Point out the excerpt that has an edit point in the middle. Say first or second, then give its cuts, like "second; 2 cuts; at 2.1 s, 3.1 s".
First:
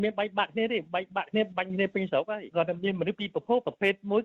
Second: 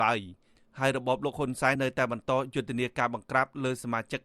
second; 1 cut; at 1.8 s